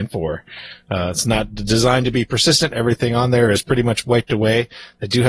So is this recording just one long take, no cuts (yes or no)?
yes